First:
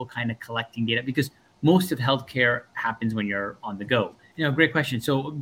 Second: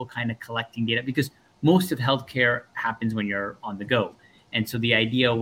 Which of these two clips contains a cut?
first; 1 cut; at 4.3 s

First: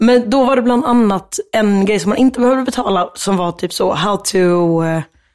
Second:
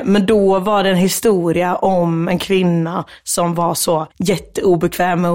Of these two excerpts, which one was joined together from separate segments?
second; 1 cut; at 4.1 s

